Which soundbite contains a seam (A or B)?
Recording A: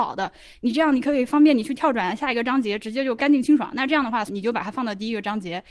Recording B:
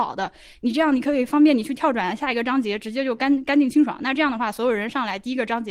A